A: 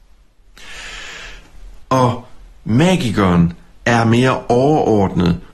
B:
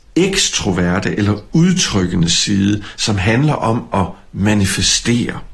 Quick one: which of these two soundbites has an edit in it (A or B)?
A